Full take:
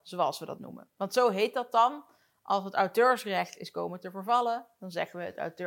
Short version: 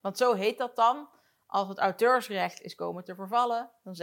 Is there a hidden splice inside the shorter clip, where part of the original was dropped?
no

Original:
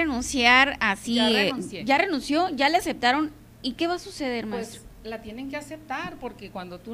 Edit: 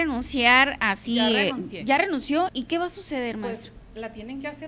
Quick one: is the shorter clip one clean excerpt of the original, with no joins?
no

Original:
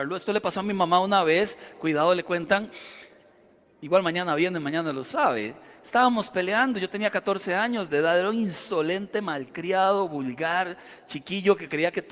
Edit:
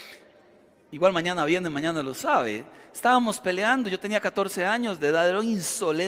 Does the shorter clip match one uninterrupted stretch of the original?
yes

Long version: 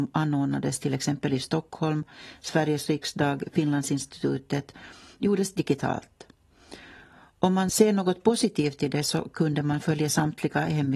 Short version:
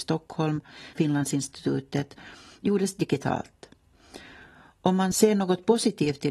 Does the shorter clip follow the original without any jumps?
no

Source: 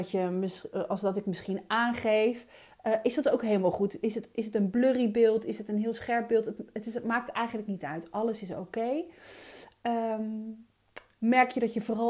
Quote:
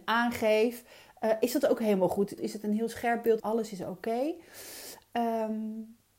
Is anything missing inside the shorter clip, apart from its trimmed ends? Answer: yes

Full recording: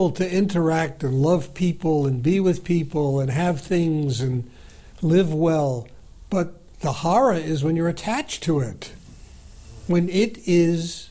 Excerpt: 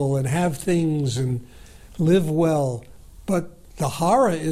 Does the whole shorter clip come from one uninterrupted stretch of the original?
yes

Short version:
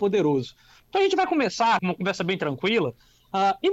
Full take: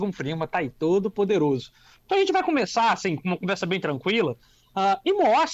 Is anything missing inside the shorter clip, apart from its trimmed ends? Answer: yes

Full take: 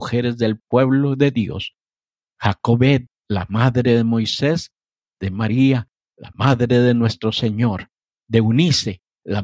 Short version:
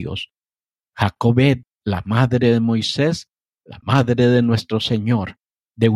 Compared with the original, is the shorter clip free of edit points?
no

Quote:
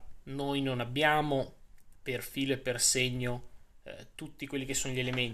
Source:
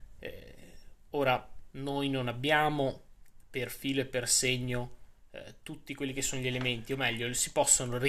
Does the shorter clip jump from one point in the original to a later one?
no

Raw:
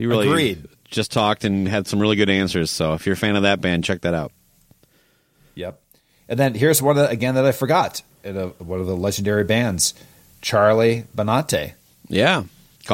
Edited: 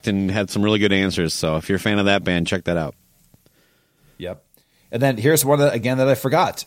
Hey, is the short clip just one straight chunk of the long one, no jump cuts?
yes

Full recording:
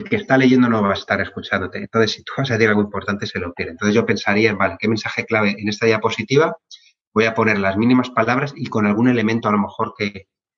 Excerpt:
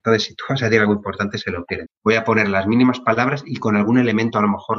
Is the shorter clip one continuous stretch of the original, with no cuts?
no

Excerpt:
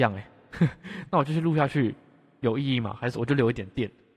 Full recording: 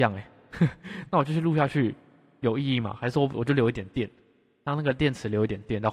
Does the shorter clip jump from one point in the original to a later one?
yes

